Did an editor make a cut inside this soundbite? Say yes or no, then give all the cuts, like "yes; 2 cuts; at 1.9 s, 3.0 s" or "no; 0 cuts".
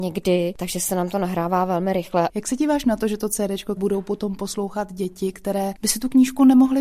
yes; 2 cuts; at 2.3 s, 3.8 s